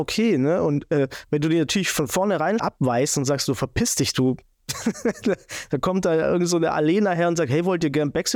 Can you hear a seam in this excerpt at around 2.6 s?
yes; 1 cut; at 2.6 s

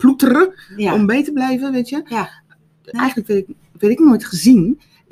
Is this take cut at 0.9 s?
no; 1 cut; at 2.9 s

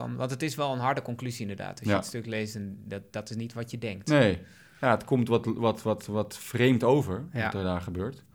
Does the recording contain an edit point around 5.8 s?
no; 0 cuts

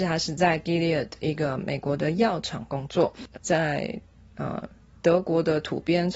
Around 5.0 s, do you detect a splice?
no; 1 cut; at 3.3 s

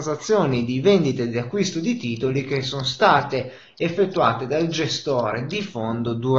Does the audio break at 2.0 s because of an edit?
no; 0 cuts

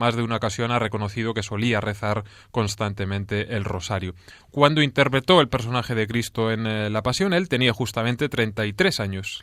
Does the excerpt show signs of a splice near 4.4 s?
yes; 1 cut; at 4.4 s

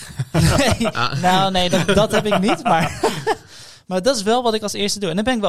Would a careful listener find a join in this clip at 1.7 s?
no; 0 cuts

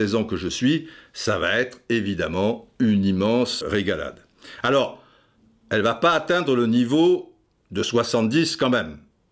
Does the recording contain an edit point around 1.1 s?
no; 1 cut; at 3.6 s

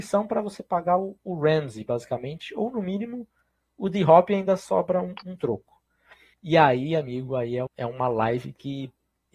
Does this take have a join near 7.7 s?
yes; 2 cuts; at 6.3 s, 7.7 s

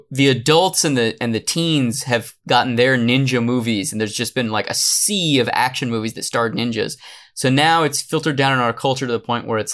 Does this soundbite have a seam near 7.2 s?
no; 0 cuts

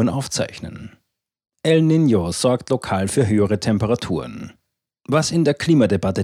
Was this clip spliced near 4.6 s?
no; 0 cuts

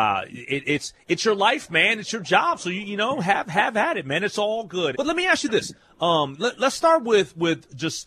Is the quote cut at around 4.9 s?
yes; 1 cut; at 4.9 s

